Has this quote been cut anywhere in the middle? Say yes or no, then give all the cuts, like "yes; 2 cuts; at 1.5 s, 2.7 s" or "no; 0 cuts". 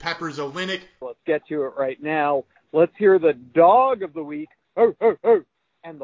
yes; 1 cut; at 1.0 s